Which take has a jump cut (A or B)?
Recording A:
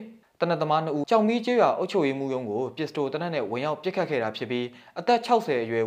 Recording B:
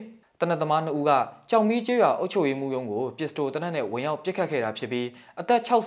A